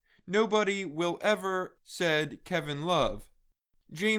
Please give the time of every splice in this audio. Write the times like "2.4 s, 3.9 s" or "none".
1.8 s